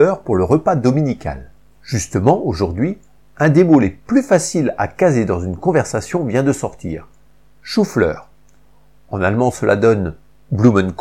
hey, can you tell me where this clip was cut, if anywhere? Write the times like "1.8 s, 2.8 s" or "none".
1.7 s